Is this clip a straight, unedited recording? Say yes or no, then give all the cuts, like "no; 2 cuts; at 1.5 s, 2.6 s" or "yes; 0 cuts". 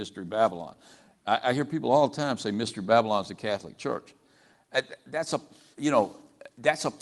yes; 0 cuts